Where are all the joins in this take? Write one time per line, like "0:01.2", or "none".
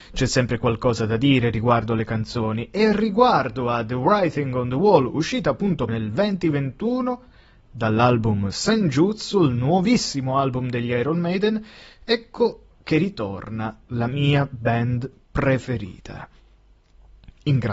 0:05.9